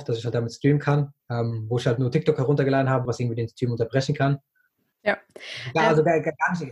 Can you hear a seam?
yes; 3 cuts; at 1.2 s, 3.1 s, 4.9 s

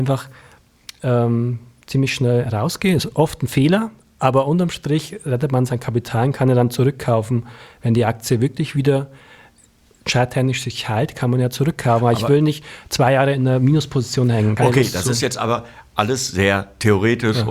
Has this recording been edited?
no; 0 cuts

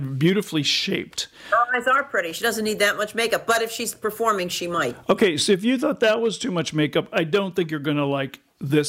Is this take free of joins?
yes; 0 cuts

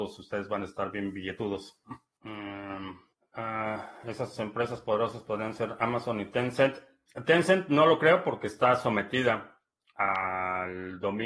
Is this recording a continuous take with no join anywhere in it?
yes; 0 cuts

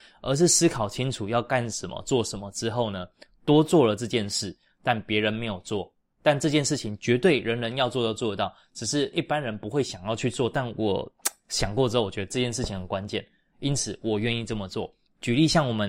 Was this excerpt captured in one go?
yes; 0 cuts

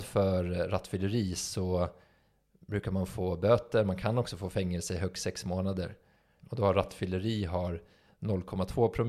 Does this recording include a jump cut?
yes; 1 cut; at 6.4 s

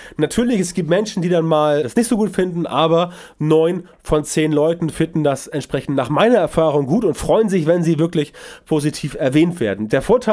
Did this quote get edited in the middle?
yes; 1 cut; at 1.8 s

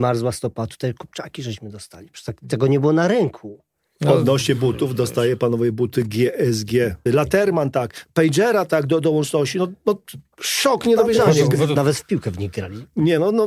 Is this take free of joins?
no; 2 cuts; at 7.1 s, 11.8 s

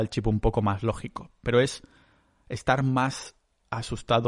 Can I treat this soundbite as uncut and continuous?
yes; 0 cuts

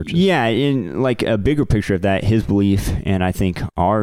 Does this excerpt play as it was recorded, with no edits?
yes; 0 cuts

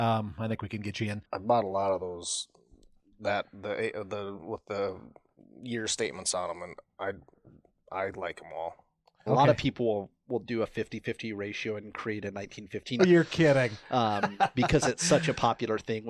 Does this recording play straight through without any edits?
no; 3 cuts; at 1.2 s, 9.3 s, 13.0 s

